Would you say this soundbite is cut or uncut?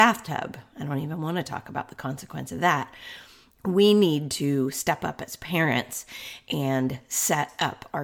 cut